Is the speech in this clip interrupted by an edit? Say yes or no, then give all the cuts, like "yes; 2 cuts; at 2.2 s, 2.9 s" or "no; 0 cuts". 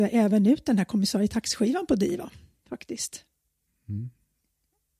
no; 0 cuts